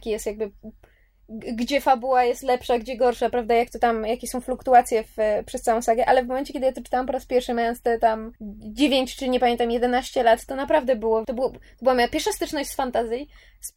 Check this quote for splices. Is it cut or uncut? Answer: cut